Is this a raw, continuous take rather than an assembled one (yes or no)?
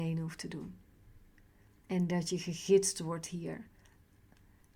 yes